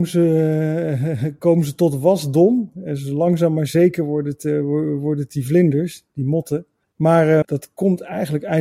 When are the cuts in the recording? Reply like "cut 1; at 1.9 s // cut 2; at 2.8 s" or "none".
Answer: cut 1; at 7.4 s